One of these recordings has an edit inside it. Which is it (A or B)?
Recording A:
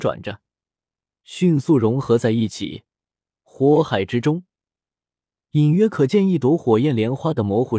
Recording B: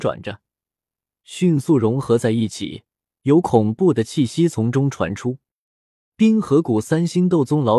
B